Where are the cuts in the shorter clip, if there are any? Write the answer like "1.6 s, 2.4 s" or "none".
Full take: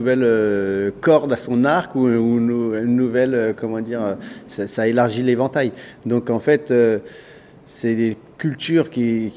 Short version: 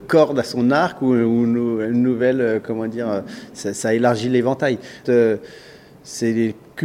5.0 s